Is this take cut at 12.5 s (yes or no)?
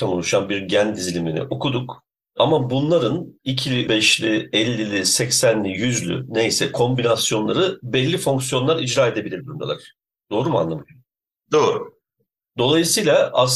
no